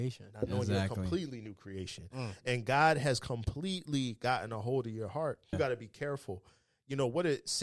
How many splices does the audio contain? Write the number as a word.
one